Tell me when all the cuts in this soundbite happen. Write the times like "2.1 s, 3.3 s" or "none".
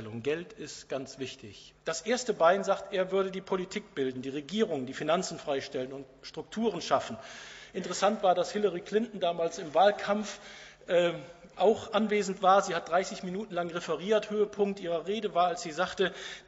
1.7 s